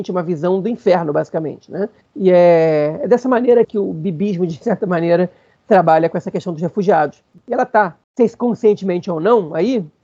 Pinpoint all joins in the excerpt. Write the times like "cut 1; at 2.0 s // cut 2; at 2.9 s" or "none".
cut 1; at 3.6 s